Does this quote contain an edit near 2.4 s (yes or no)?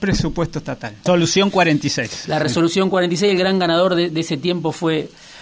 no